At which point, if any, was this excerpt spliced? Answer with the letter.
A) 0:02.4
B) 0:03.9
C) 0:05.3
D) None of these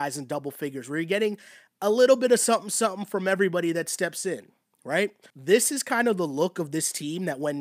C